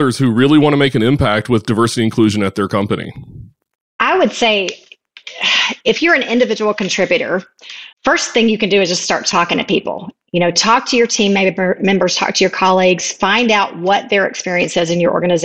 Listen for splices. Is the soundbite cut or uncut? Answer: cut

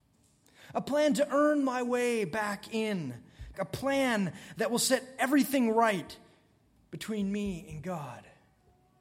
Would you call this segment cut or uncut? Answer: cut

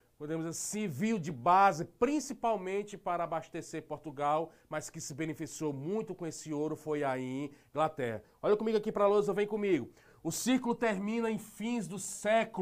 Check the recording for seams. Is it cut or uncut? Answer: uncut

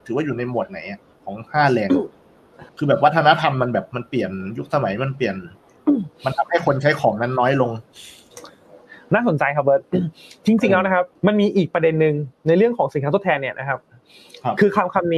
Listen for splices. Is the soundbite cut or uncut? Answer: cut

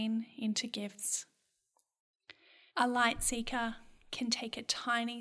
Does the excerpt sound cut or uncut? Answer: cut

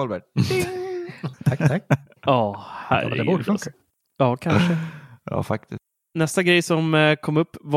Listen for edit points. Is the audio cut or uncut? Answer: cut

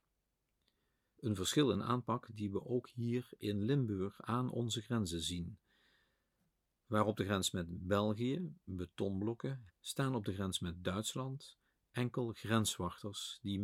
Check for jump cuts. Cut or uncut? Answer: cut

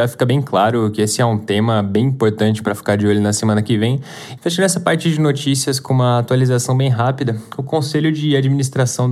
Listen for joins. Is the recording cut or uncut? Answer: cut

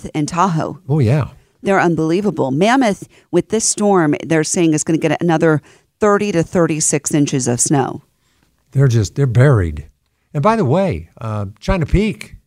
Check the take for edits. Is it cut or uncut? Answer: uncut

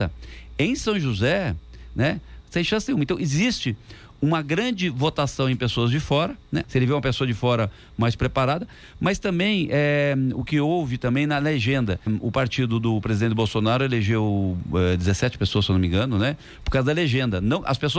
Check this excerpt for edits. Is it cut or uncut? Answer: cut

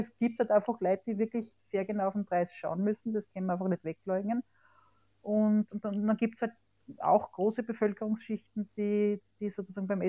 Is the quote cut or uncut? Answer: uncut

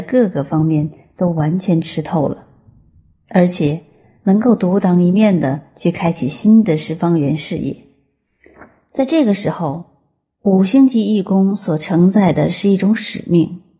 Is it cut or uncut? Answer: uncut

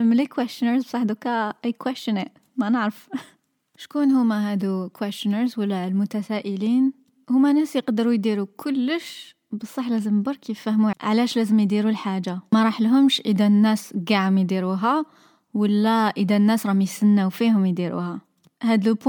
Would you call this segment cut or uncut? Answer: cut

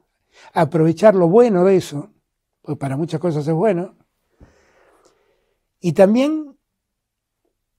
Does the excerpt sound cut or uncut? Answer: uncut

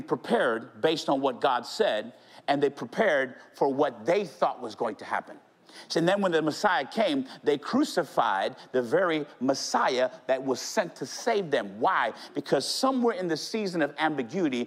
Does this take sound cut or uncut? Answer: uncut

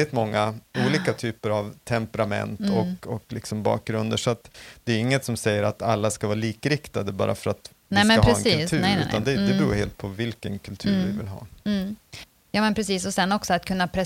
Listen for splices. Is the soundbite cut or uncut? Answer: uncut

